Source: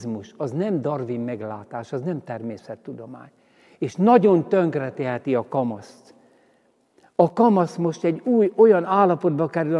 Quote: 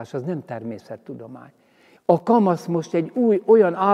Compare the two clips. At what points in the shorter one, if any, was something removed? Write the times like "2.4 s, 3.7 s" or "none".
2.0 s